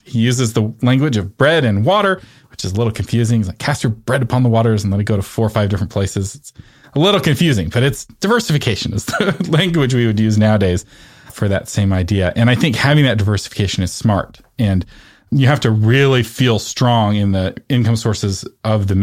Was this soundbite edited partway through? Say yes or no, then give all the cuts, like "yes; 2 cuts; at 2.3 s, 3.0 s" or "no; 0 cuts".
no; 0 cuts